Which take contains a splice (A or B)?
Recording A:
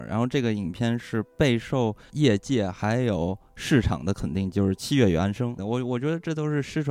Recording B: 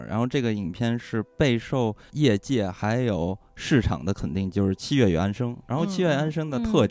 A